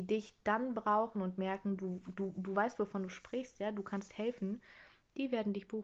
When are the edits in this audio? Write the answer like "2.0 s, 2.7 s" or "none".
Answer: none